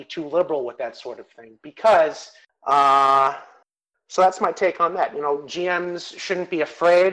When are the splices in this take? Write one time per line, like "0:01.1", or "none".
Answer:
0:02.5